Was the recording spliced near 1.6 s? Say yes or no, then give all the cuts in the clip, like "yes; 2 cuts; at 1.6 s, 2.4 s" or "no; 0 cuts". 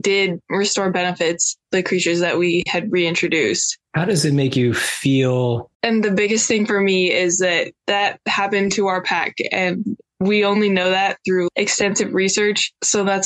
yes; 3 cuts; at 1.6 s, 3.8 s, 5.7 s